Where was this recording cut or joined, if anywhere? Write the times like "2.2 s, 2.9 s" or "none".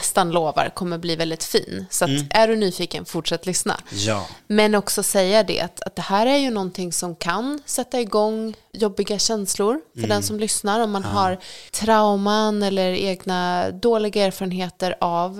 none